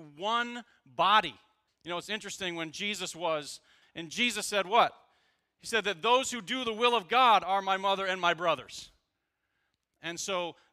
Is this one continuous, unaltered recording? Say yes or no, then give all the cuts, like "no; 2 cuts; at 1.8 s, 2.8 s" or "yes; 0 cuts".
no; 2 cuts; at 1.7 s, 3.8 s